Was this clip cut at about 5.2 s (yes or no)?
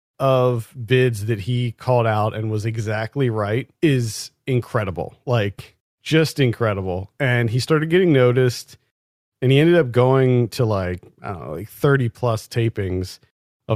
no